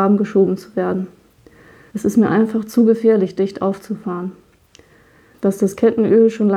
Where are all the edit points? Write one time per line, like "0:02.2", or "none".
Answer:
0:01.9
0:05.3